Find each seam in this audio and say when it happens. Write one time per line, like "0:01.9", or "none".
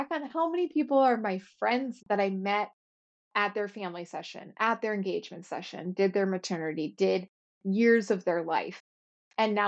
0:02.0
0:05.9

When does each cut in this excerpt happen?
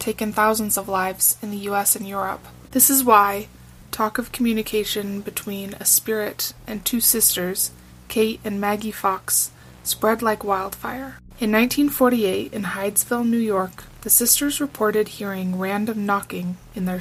0:03.8

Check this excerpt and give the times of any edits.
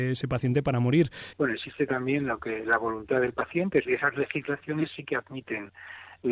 0:01.3
0:03.8

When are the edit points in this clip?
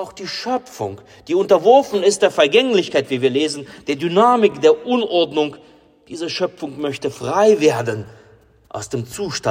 none

